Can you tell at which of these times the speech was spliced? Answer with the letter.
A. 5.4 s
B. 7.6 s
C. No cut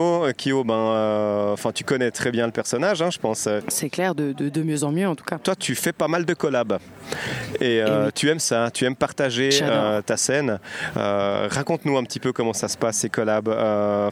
C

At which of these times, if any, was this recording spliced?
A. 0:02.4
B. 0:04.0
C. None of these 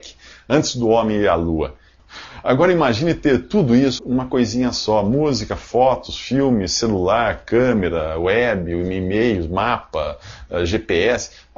B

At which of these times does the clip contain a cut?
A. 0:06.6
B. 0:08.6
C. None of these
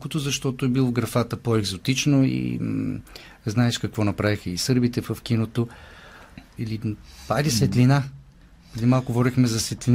A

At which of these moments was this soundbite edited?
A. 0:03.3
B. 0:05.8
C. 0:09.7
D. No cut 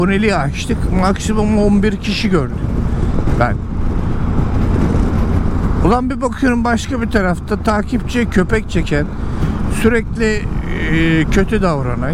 D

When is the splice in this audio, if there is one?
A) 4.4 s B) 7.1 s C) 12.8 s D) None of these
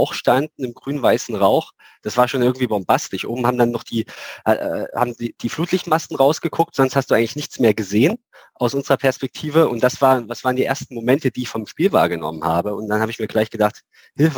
D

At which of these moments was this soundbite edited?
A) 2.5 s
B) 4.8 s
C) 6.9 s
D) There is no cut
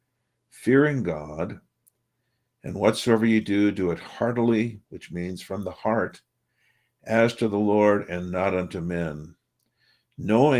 B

